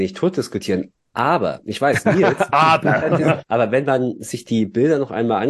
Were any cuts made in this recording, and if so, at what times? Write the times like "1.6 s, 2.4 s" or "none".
3.4 s